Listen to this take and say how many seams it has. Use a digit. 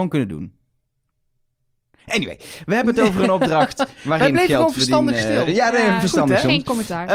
0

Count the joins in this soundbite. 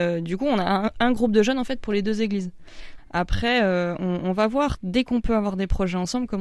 1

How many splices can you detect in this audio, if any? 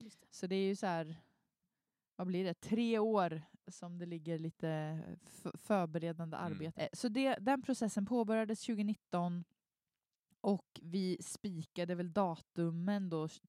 1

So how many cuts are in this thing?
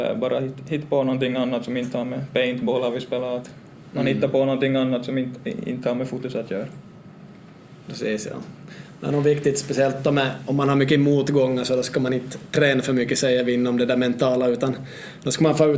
0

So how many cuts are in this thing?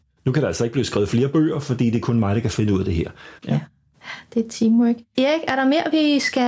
2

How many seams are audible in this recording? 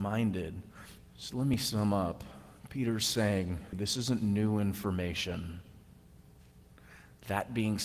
2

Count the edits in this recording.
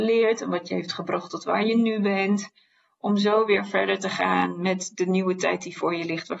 0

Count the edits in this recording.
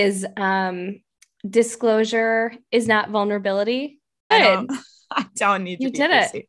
1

